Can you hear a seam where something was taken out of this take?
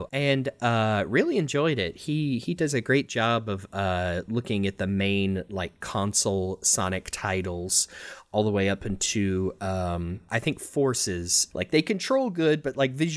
yes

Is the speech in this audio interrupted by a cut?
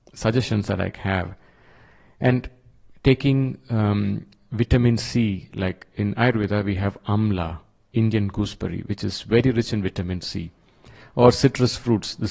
no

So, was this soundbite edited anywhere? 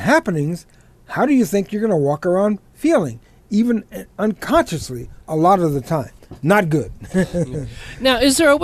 yes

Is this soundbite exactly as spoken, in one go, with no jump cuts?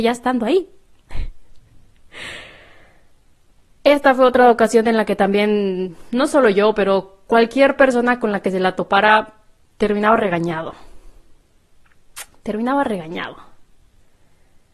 yes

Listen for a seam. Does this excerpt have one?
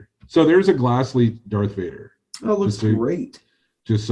no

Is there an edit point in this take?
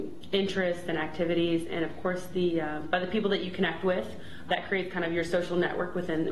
yes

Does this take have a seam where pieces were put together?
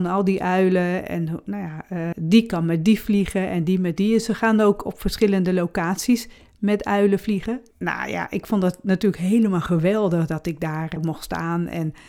yes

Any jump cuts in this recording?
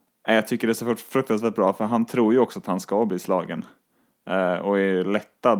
no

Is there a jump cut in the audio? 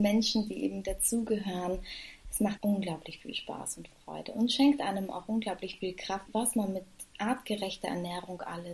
yes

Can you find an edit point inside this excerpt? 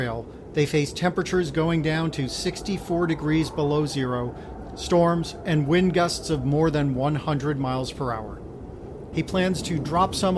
yes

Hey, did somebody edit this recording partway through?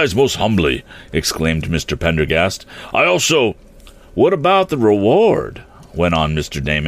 no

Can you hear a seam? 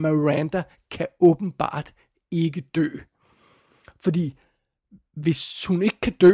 no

